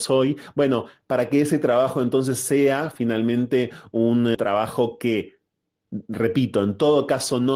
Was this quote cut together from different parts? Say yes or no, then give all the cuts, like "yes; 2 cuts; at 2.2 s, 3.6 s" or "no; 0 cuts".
yes; 1 cut; at 4.3 s